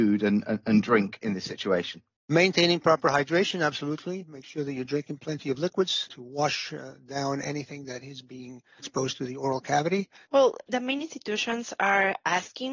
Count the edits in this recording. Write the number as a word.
two